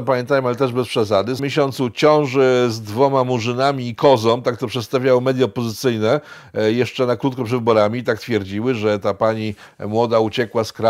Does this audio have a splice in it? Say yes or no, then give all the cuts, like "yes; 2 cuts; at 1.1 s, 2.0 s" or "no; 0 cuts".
yes; 1 cut; at 1.4 s